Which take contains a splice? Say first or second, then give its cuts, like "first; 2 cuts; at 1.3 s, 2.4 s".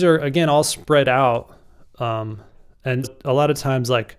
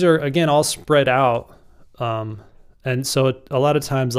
first; 1 cut; at 3.0 s